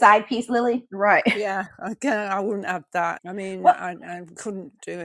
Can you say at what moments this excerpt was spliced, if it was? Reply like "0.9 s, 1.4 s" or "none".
3.2 s